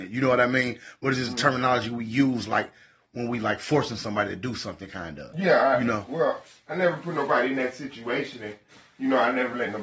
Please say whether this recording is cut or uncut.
uncut